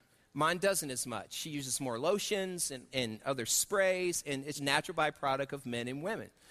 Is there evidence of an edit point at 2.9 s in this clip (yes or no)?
yes